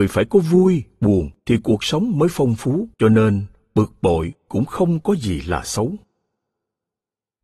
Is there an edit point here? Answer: yes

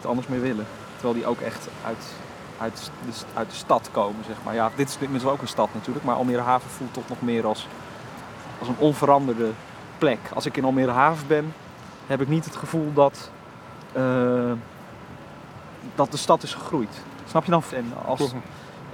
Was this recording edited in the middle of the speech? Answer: yes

